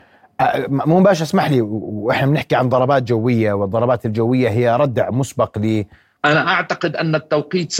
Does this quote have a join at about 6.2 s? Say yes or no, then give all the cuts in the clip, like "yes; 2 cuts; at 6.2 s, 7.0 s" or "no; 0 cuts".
yes; 1 cut; at 6.2 s